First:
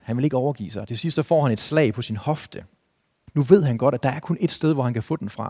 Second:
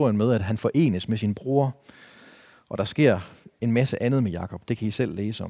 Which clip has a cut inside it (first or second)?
first